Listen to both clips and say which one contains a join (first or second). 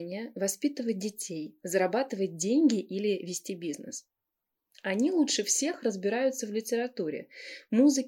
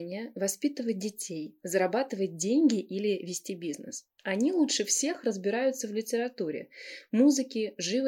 second